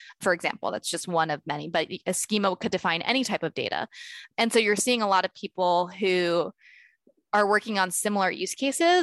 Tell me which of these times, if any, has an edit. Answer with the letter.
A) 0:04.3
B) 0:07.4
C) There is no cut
C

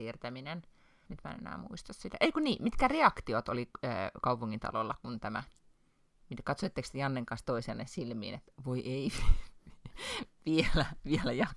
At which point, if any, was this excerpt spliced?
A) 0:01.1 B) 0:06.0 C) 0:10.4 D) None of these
A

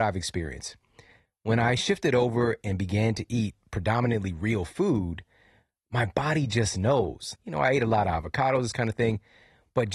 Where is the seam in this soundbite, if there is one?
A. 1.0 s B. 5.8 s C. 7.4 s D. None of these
C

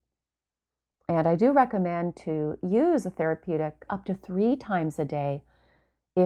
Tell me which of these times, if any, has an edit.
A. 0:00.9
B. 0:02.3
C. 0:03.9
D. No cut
C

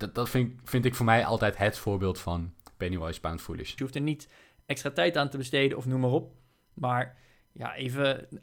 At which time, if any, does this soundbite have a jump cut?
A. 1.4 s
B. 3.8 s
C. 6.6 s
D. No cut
B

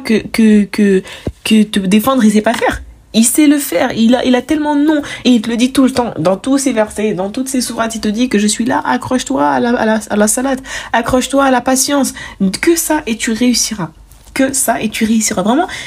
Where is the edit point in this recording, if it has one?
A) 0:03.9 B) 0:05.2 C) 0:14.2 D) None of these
B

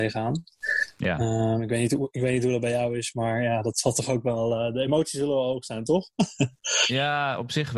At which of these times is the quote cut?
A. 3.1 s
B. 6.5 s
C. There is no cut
C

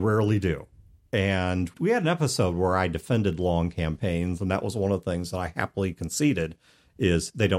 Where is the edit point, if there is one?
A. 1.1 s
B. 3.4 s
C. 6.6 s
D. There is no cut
D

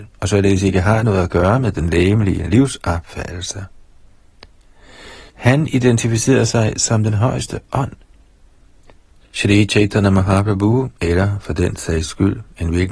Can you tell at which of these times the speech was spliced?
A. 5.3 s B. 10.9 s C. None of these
A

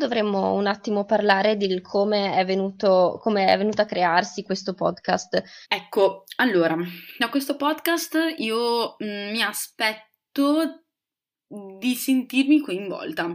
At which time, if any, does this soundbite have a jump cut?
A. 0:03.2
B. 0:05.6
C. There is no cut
B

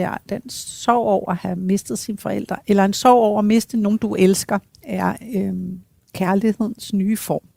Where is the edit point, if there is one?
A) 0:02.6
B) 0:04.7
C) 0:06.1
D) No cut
A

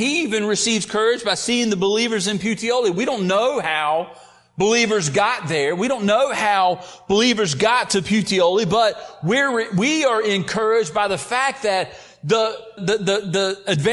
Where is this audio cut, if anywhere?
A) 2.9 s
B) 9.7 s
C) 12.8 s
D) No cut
C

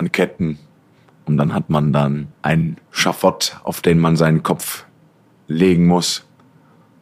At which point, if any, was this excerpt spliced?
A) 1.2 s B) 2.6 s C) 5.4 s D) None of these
D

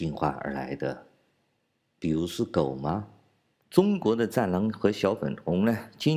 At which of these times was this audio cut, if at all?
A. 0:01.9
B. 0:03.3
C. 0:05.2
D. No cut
D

